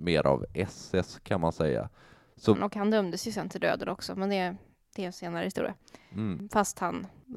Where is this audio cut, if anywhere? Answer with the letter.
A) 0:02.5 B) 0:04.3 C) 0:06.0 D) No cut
A